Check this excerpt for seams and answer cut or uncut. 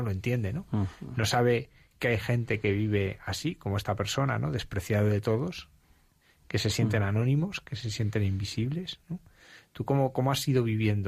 uncut